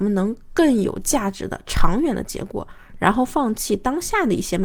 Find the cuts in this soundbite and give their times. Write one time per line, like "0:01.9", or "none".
none